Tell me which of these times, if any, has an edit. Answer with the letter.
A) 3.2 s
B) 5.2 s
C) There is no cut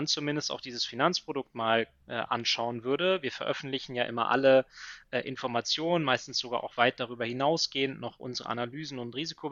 C